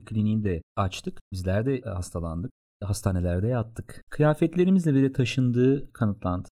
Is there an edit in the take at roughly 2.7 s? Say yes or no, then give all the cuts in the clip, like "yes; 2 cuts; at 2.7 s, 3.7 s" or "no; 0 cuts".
no; 2 cuts; at 1.3 s, 4.1 s